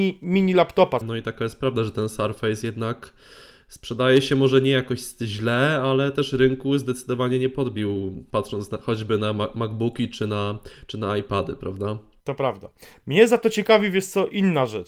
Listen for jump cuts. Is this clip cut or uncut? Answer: cut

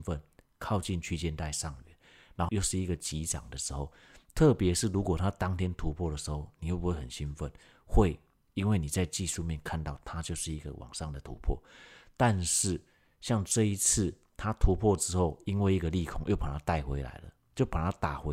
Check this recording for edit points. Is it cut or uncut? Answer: cut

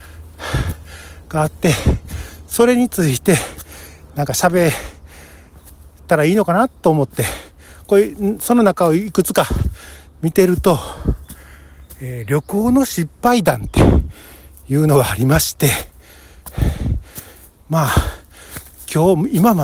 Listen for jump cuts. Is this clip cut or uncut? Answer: uncut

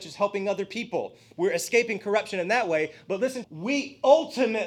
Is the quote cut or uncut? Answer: cut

